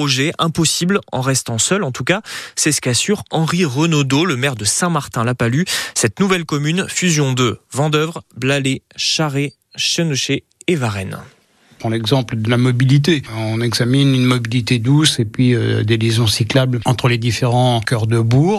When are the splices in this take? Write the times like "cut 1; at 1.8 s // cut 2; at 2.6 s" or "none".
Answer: none